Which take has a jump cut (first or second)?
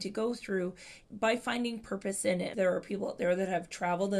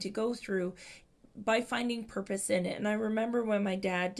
first